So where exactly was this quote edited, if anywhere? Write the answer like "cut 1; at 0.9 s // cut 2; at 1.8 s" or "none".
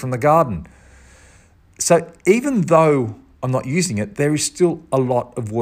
none